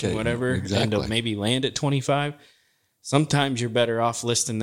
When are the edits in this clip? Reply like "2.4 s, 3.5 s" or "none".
none